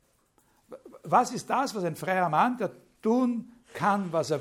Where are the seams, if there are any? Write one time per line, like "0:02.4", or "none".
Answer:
none